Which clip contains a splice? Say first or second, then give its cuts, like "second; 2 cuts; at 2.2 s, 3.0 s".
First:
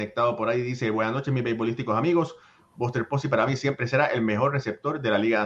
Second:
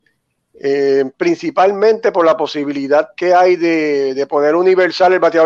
second; 1 cut; at 1.1 s